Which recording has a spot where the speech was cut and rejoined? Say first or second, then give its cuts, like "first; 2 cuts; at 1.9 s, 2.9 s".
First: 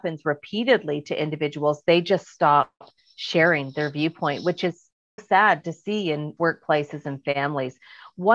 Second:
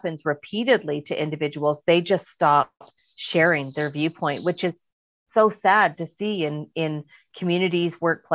first; 2 cuts; at 5.2 s, 6.4 s